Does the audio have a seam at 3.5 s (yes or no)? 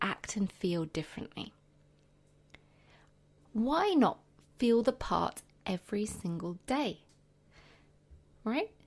yes